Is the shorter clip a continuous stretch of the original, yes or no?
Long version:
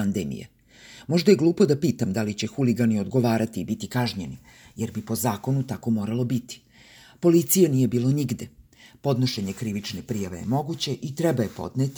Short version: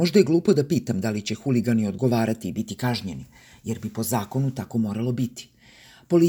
yes